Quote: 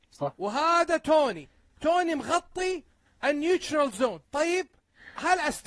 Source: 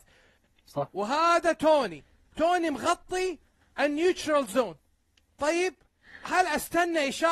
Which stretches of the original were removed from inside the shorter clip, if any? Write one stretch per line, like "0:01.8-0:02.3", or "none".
0:04.8-0:05.3